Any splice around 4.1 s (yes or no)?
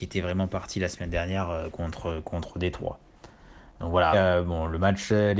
yes